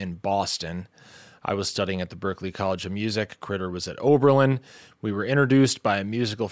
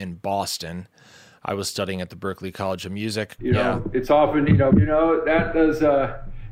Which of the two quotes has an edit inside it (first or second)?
second